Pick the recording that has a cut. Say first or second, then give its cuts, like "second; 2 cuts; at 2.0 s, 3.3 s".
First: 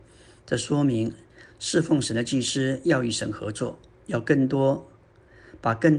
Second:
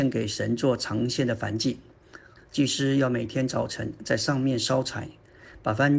second; 1 cut; at 2.4 s